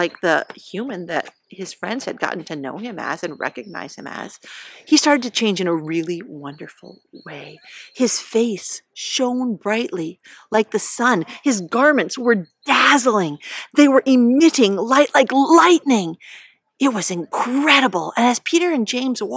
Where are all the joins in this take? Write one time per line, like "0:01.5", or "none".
none